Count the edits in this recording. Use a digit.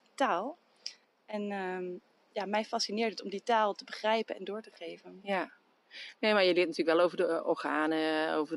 0